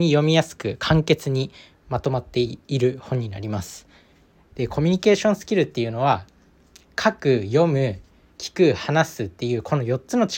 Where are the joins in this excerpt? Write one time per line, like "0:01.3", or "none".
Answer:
0:04.5